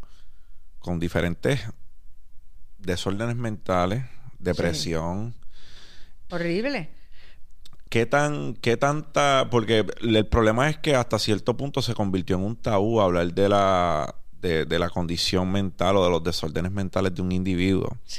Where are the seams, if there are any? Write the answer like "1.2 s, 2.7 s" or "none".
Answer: 6.3 s, 7.9 s, 14.7 s